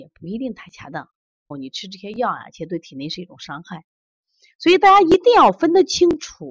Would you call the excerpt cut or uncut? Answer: cut